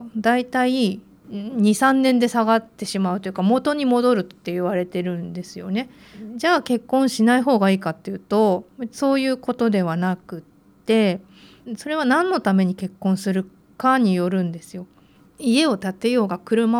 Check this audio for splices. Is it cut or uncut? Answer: cut